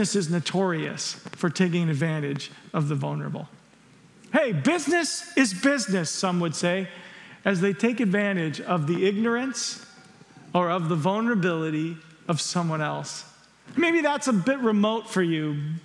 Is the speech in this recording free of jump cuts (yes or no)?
yes